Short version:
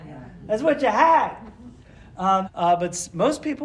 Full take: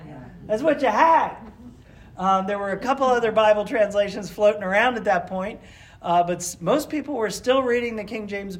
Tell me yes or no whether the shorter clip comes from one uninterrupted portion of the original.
no